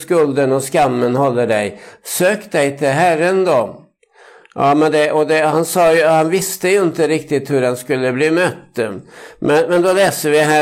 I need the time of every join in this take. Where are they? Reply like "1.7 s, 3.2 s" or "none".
none